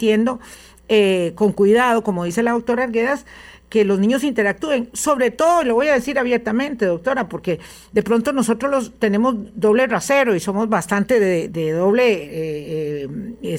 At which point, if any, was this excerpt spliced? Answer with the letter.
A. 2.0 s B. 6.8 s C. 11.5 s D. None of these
C